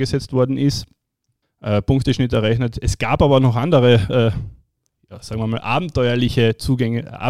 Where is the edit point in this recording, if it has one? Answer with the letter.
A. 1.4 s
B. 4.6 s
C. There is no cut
A